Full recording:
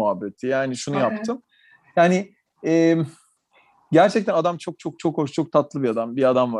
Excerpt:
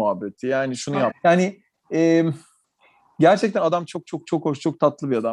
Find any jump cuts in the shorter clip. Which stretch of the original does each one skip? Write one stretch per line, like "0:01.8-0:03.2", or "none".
0:01.1-0:01.8